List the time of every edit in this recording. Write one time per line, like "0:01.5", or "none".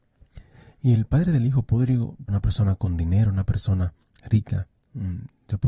0:02.3

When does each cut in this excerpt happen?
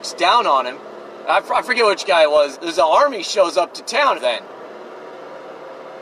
0:01.2
0:02.5
0:04.2

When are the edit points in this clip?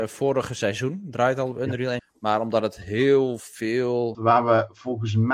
0:02.0
0:04.1

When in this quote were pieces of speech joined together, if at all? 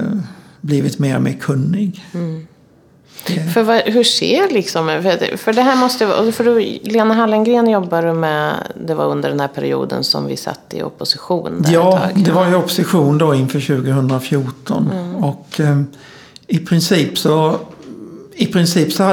none

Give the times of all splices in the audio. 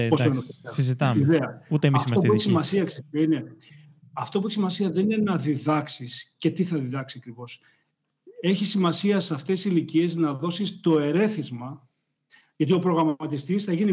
none

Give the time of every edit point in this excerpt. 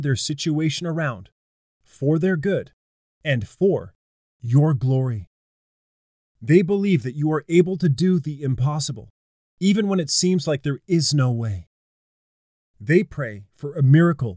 none

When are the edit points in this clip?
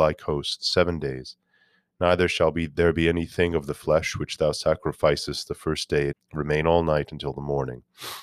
0:06.1

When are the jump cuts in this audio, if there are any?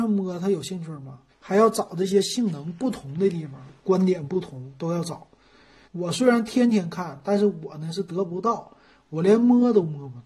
0:01.3
0:05.8

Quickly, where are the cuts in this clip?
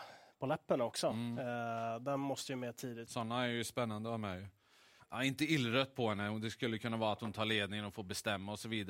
0:03.0
0:05.0

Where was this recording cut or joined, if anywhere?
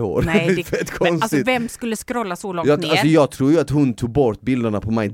none

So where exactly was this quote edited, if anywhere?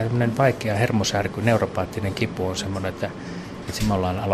none

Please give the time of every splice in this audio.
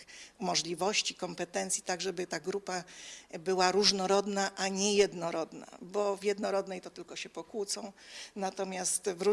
none

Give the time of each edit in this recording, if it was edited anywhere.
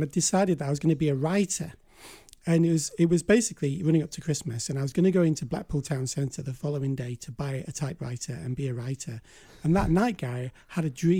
none

